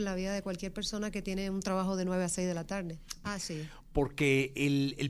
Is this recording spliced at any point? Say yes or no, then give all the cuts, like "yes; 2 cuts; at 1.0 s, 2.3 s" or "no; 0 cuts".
yes; 1 cut; at 3.2 s